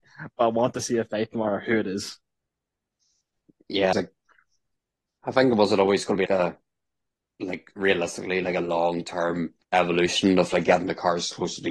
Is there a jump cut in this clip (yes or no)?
yes